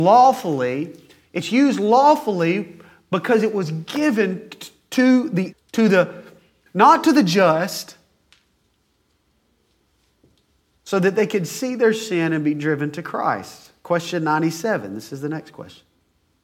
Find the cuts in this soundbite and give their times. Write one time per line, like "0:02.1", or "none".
0:05.5